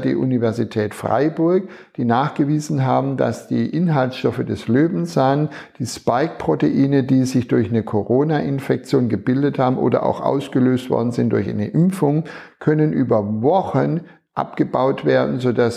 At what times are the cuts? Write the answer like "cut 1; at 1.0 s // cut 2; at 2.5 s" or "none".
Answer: none